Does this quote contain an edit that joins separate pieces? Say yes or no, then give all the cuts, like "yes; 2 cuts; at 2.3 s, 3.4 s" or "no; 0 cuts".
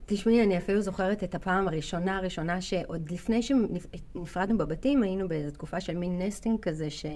no; 0 cuts